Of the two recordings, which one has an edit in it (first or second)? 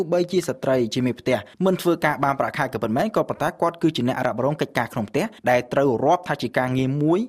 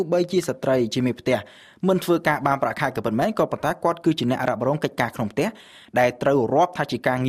first